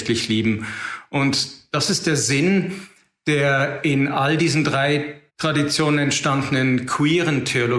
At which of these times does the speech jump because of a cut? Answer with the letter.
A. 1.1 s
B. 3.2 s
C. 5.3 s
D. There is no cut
C